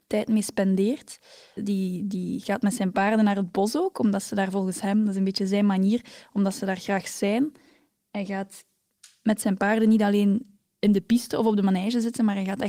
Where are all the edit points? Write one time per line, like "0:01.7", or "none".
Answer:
0:01.6